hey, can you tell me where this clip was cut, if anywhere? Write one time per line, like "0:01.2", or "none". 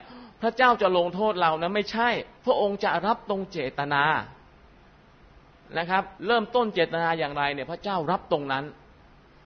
0:02.4
0:06.2